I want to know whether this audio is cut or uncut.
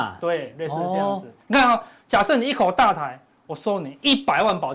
uncut